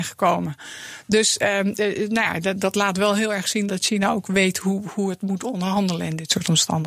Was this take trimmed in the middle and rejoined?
yes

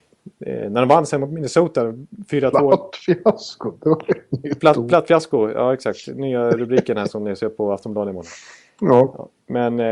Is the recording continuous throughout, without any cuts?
yes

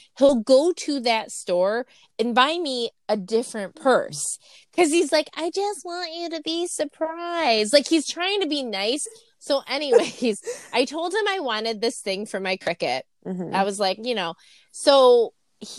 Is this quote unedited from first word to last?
no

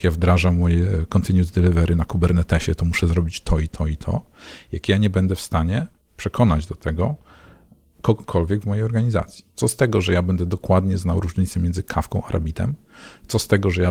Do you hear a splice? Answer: yes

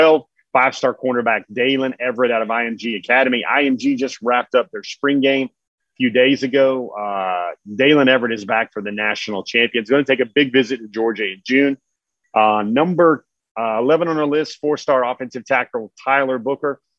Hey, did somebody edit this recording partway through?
no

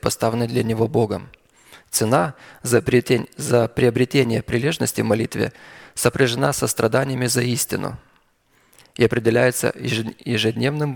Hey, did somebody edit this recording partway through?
no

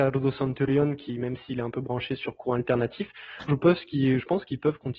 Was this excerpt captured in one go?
no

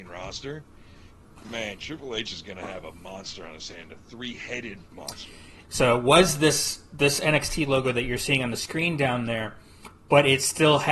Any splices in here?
yes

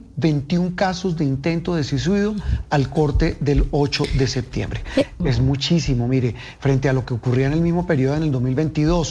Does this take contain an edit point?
yes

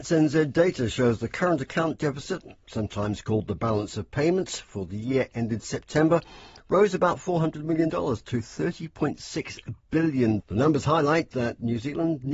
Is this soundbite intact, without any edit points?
no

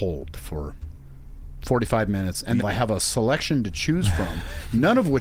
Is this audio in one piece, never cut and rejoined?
no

